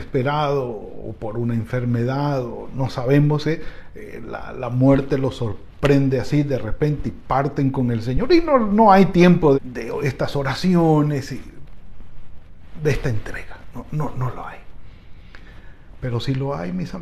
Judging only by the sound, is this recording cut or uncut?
cut